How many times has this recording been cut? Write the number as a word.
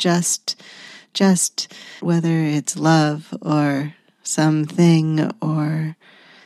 one